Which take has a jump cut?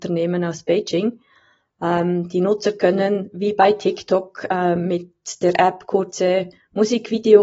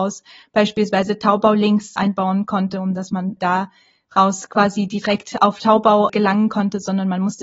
second; 3 cuts; at 2.0 s, 3.4 s, 6.1 s

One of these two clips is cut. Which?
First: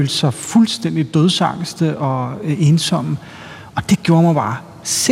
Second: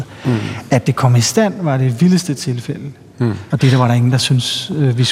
second; 1 cut; at 3.5 s

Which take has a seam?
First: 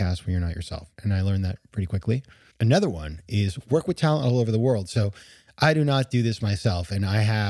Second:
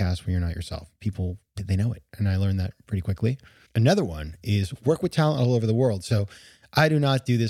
first; 1 cut; at 0.9 s

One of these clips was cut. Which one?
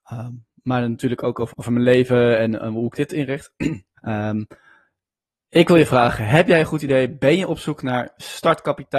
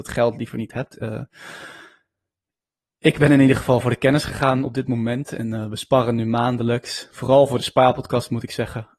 first; 2 cuts; at 1.5 s, 4.0 s

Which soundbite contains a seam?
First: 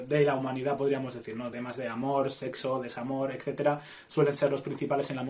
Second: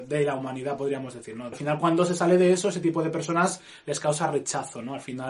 second; 1 cut; at 1.5 s

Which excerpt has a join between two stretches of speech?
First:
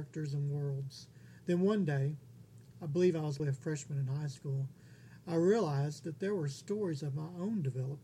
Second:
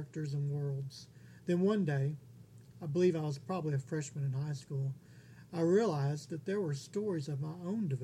first; 1 cut; at 3.4 s

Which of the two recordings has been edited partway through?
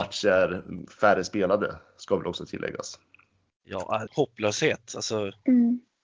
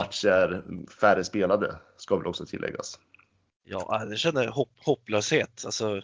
first; 1 cut; at 4.1 s

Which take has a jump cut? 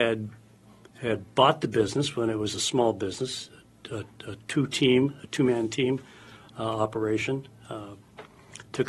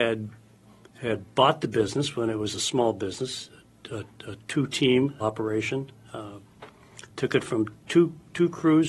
second; 1 cut; at 5.2 s

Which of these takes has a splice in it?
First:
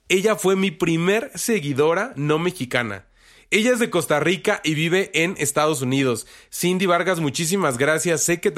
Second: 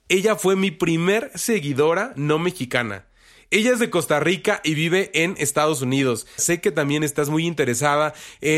second; 1 cut; at 6.4 s

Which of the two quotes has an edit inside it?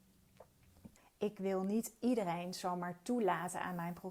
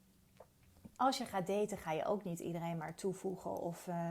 first; 1 cut; at 1.0 s

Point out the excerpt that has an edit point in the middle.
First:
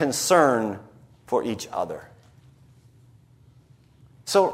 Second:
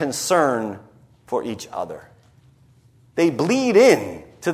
second; 1 cut; at 3.1 s

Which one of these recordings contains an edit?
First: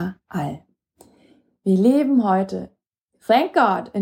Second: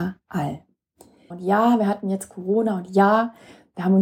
second; 1 cut; at 1.3 s

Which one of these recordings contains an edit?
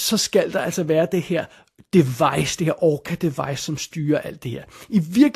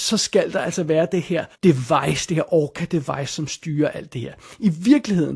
second; 1 cut; at 1.5 s

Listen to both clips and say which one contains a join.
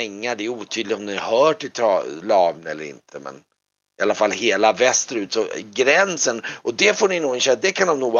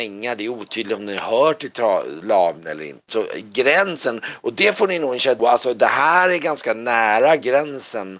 second; 2 cuts; at 3.1 s, 5.4 s

